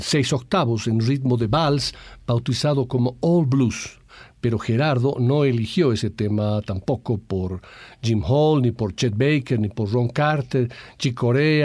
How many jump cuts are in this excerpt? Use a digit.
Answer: 0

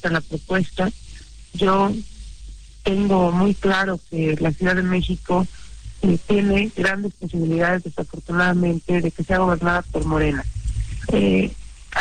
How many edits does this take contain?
1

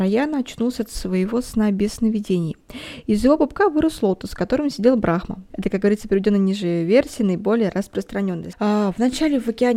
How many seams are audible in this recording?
2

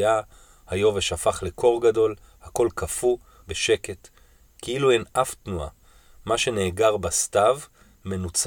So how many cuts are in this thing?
1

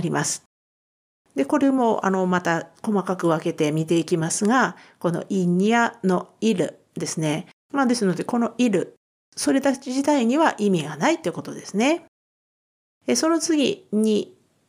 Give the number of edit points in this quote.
1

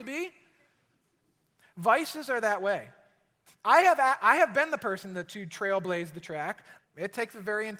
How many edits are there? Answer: 2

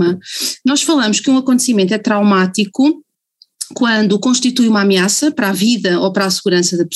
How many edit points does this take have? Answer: 0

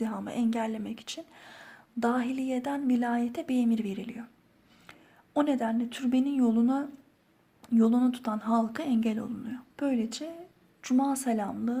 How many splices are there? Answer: 1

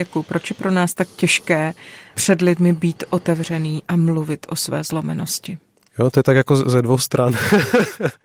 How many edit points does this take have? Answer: 1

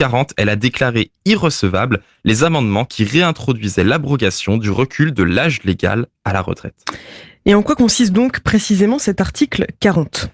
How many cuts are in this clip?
0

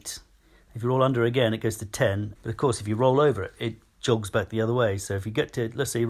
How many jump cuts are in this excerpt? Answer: 1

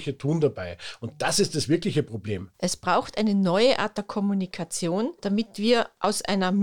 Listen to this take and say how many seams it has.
2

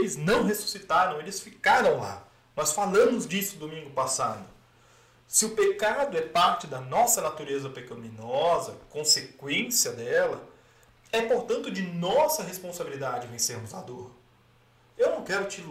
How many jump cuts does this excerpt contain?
0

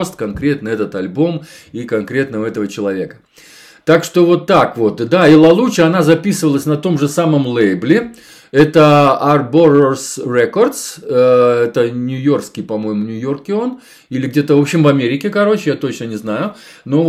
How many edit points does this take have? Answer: 0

